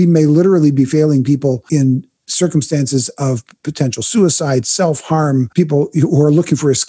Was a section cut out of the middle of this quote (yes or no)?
yes